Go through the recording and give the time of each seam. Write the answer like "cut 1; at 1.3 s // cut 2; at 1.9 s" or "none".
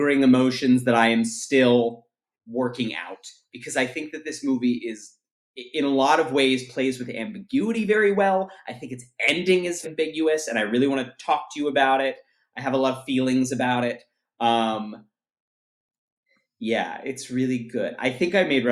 cut 1; at 9.8 s